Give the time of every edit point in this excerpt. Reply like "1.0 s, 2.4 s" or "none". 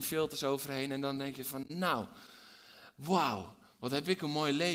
none